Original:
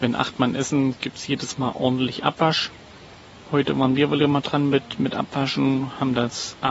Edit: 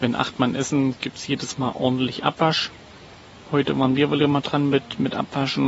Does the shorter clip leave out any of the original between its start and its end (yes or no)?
no